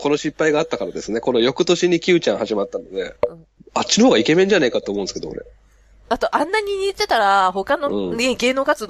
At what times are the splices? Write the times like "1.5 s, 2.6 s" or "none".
3.2 s

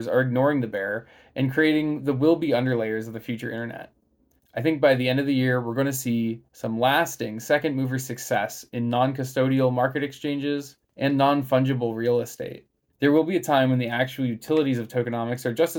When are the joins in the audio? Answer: 10.8 s, 12.9 s

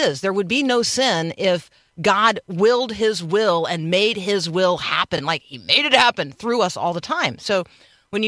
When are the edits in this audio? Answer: none

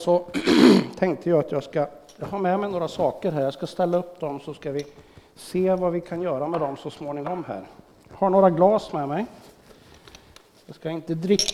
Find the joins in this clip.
none

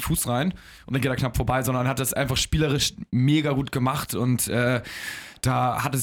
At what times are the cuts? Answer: none

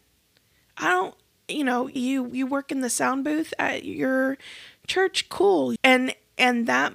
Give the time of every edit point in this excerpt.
2.0 s, 5.8 s

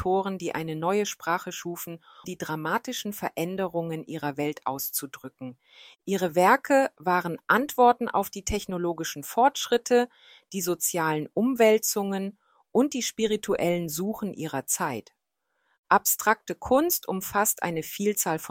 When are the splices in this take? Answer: 2.2 s

